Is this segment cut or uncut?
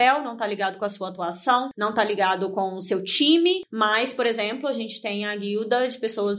uncut